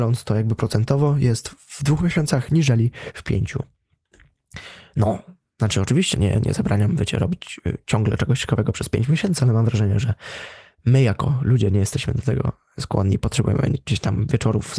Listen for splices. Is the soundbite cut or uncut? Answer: uncut